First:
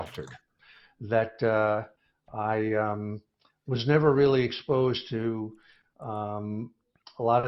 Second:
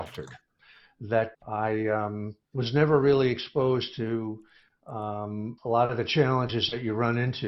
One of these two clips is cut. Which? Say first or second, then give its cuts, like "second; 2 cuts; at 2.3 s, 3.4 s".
second; 3 cuts; at 1.3 s, 2.4 s, 5.6 s